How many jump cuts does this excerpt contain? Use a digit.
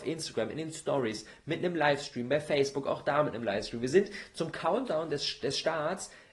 0